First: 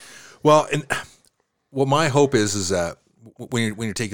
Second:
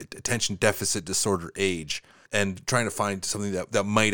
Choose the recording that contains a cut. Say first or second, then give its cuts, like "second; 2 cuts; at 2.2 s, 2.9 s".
second; 1 cut; at 2.3 s